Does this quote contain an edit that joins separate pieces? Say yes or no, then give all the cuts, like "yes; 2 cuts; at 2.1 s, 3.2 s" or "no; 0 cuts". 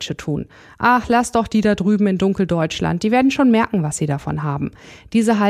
no; 0 cuts